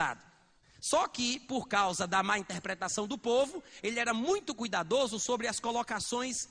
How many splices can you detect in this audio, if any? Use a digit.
0